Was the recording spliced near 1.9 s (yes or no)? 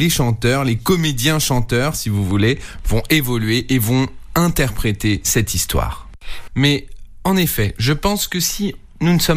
no